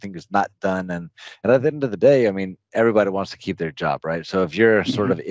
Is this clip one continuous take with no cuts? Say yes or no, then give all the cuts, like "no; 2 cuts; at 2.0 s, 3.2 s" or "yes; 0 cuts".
yes; 0 cuts